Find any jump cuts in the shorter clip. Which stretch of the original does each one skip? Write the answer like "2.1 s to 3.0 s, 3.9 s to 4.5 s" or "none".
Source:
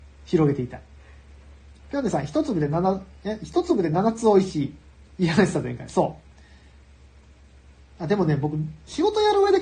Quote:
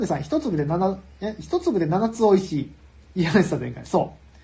none